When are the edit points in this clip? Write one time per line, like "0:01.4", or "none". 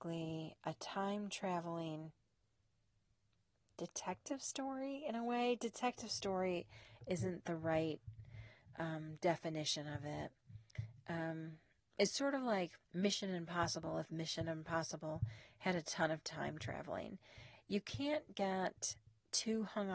0:12.8
0:17.6